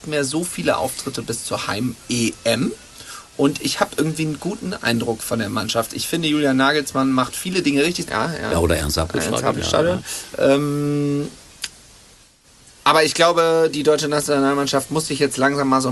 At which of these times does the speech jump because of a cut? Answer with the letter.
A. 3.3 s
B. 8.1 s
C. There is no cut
B